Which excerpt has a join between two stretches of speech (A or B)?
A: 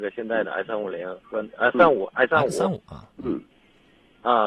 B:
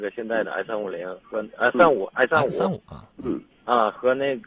B